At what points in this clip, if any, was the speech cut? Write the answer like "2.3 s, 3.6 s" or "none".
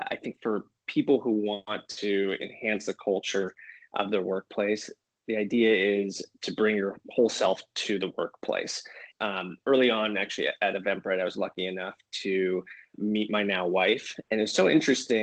9.1 s, 12.9 s, 14.2 s